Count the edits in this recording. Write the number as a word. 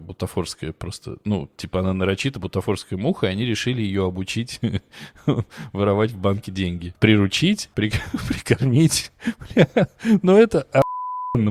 zero